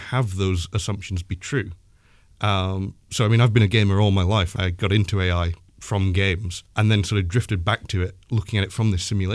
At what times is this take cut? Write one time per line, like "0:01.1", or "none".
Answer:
0:04.6
0:06.7